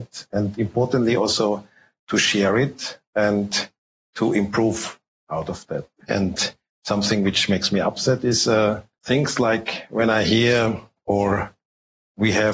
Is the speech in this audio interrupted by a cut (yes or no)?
yes